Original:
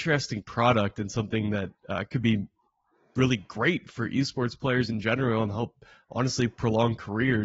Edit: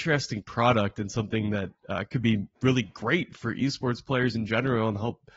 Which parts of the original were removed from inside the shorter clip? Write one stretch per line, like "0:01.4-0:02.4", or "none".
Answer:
0:02.5-0:03.1